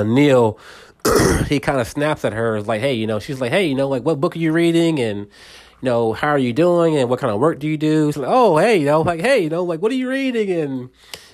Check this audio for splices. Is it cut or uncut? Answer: cut